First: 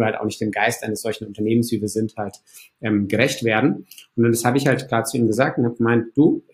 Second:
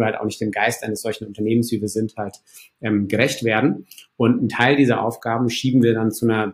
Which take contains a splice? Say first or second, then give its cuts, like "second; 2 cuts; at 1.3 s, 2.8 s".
second; 1 cut; at 4.1 s